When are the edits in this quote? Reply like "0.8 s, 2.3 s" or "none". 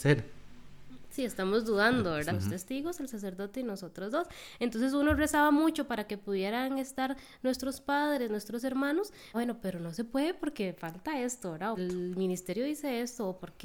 2.3 s, 9.3 s, 11.7 s